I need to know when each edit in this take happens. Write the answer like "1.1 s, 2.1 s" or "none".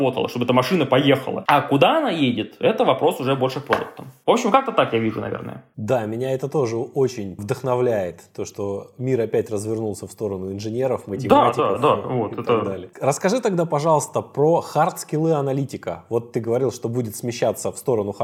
none